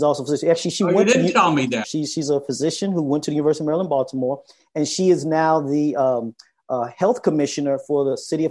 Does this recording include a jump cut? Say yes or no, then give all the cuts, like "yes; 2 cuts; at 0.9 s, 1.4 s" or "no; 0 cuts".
yes; 1 cut; at 1.8 s